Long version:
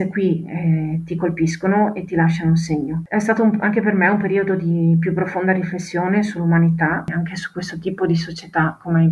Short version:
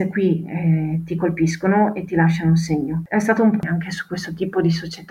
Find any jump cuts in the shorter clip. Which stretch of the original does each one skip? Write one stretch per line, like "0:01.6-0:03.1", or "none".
0:03.6-0:07.1